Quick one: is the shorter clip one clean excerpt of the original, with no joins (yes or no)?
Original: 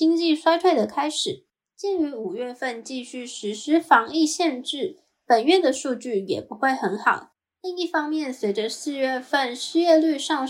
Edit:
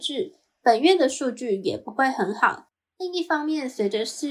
yes